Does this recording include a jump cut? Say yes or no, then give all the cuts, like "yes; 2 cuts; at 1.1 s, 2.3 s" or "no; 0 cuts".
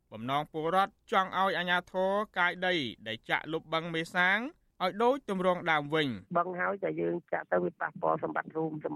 yes; 1 cut; at 6.3 s